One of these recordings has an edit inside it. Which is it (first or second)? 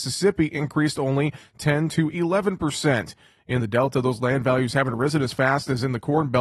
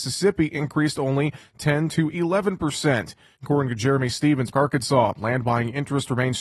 second